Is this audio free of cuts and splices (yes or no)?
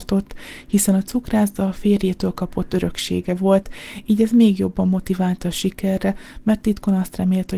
yes